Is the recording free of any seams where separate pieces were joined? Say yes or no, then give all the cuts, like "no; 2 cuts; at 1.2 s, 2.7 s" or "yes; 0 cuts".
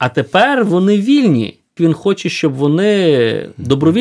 no; 1 cut; at 1.8 s